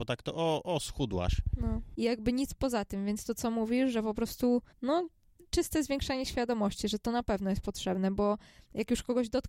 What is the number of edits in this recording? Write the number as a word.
two